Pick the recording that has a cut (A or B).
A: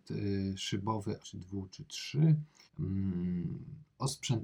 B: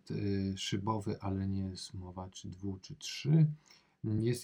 A